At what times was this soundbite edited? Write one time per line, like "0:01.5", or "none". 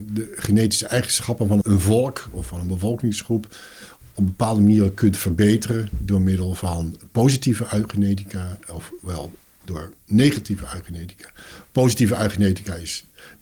0:01.6